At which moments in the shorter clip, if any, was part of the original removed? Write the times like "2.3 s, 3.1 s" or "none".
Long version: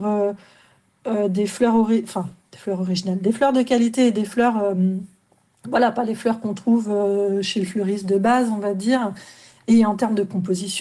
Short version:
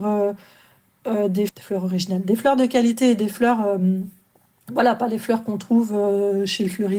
1.5 s